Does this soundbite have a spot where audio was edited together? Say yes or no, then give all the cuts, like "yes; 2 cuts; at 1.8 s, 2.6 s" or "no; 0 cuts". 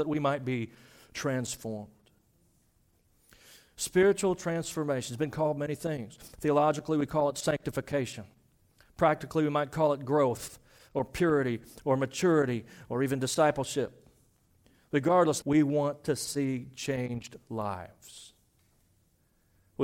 yes; 1 cut; at 15.4 s